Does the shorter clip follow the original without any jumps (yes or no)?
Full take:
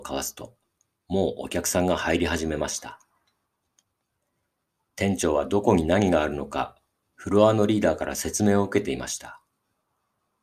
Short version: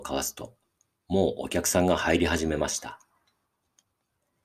yes